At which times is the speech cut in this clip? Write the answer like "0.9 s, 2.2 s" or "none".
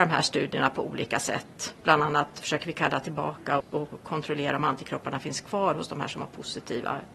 3.6 s